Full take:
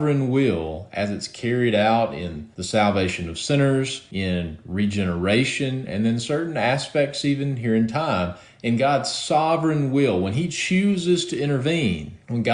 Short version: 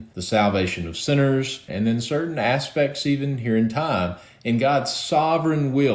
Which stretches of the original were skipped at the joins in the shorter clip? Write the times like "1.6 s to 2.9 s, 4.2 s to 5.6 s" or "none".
4.1 s to 5.9 s